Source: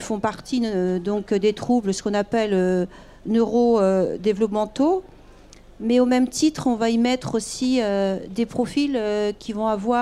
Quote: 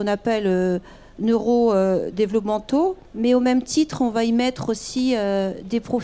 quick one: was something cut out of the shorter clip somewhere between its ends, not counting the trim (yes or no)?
yes